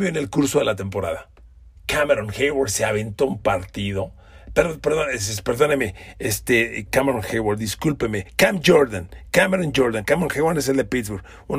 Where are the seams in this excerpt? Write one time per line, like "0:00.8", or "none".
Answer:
0:01.8
0:06.9